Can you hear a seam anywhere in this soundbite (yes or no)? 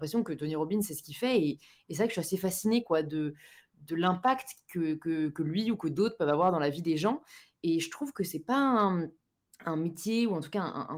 no